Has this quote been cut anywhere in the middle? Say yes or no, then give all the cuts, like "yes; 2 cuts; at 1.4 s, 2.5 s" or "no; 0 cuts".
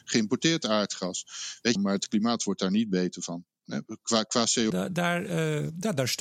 yes; 2 cuts; at 1.8 s, 4.7 s